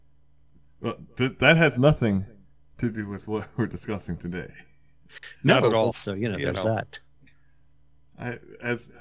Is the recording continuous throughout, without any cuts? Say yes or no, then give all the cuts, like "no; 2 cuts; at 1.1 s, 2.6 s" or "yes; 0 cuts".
no; 1 cut; at 5.9 s